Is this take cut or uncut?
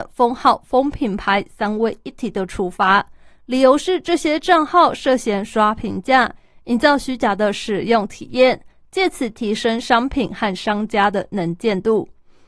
uncut